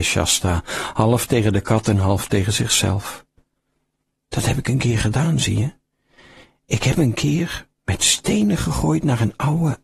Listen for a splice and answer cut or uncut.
uncut